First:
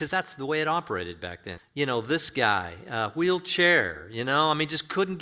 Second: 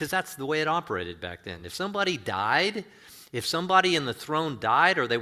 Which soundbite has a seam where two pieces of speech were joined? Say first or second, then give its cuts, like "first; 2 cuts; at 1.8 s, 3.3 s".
first; 1 cut; at 1.6 s